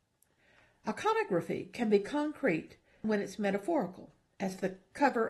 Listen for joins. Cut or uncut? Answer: cut